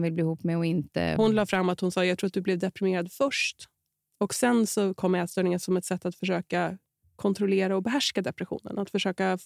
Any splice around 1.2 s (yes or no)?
yes